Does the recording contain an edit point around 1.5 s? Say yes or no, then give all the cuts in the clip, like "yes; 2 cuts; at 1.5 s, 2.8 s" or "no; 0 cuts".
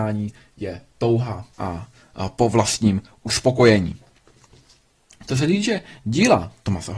yes; 1 cut; at 1.5 s